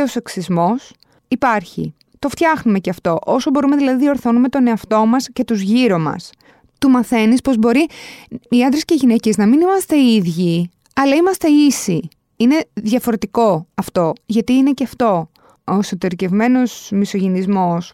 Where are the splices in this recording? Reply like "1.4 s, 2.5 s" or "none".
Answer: 6.7 s, 14.2 s